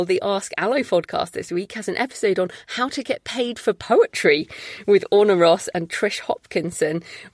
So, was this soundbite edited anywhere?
no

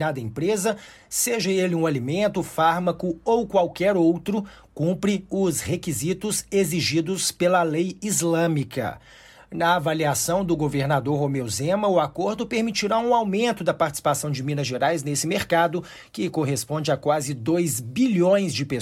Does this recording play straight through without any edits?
yes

